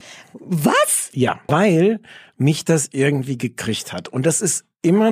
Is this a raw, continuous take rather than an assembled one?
no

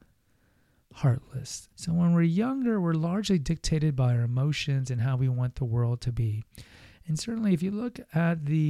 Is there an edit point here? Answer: yes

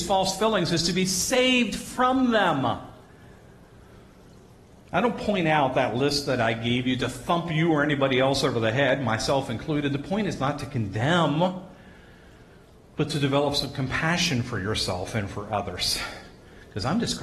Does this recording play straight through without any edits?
yes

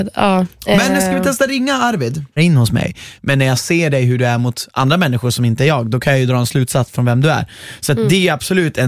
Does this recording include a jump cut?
yes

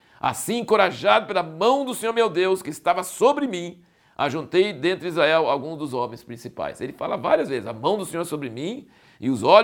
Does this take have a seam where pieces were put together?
no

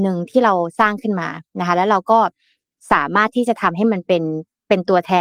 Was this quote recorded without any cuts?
yes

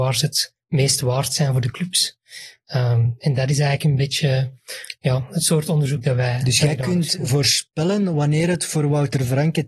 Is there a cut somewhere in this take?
no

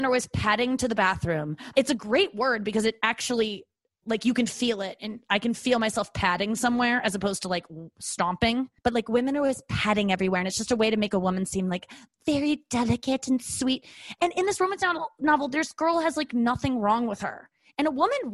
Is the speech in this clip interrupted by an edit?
yes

